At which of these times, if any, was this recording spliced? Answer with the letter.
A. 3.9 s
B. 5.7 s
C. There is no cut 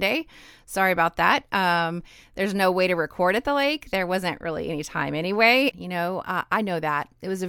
B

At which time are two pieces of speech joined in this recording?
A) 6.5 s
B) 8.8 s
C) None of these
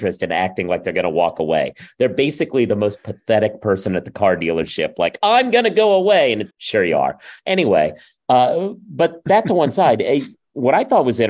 A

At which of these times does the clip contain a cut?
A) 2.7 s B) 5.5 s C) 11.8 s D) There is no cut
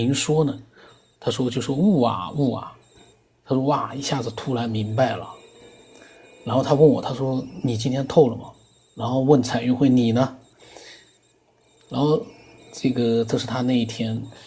D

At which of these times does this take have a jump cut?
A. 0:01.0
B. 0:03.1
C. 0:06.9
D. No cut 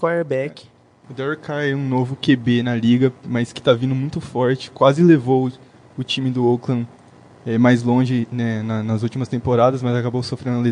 D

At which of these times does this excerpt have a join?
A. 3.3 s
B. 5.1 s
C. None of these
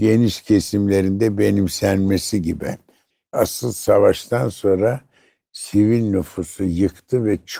A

